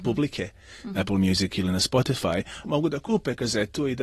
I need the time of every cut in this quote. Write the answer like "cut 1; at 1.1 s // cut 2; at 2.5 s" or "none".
cut 1; at 0.9 s // cut 2; at 2.6 s

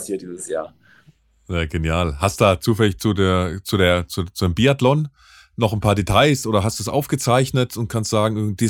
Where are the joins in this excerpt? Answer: none

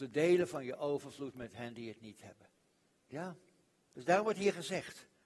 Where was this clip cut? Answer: cut 1; at 2.9 s

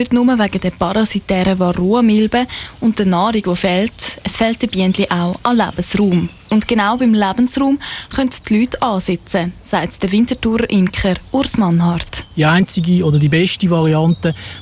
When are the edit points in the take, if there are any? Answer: none

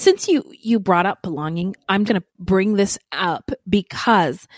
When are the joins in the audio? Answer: cut 1; at 2.1 s

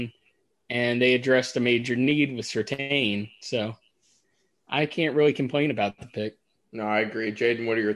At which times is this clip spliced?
cut 1; at 6.6 s

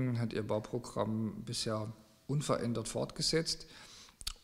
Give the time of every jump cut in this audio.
none

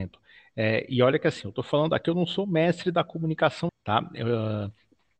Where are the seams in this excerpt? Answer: cut 1; at 3.7 s

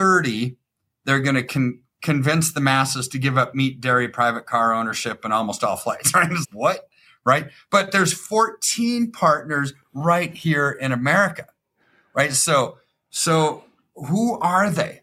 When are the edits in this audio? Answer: cut 1; at 6.4 s

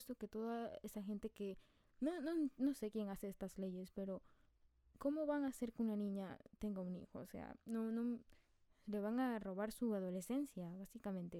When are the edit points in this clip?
none

